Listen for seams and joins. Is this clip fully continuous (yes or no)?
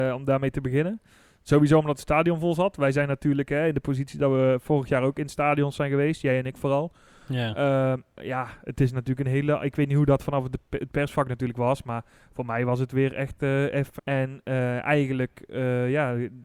no